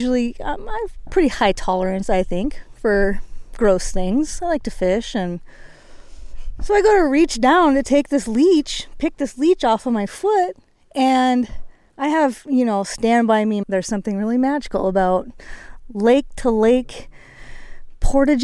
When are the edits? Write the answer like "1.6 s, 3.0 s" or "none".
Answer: 13.6 s